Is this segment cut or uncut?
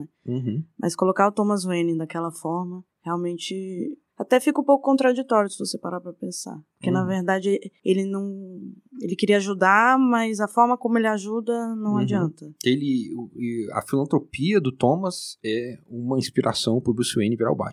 uncut